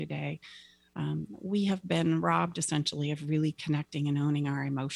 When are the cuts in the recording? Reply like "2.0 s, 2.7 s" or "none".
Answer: none